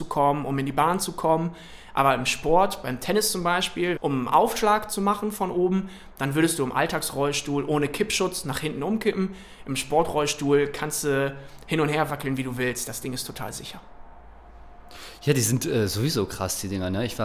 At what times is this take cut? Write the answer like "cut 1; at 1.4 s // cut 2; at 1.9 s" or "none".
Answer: cut 1; at 4.0 s